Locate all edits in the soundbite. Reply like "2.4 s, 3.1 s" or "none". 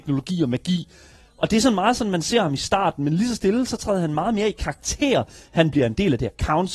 none